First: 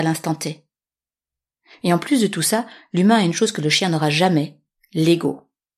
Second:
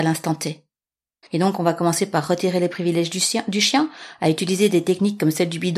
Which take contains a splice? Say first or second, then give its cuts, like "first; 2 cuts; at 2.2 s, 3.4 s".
second; 1 cut; at 1.2 s